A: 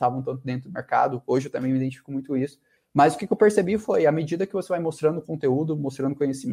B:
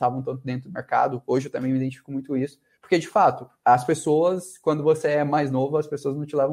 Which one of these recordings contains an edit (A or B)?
A